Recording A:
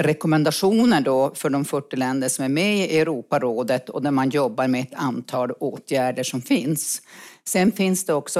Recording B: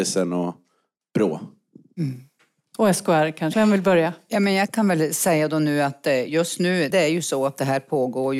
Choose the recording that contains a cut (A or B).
B